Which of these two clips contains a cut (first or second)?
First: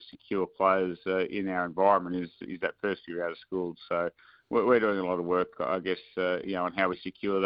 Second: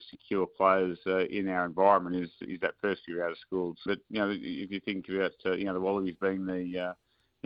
second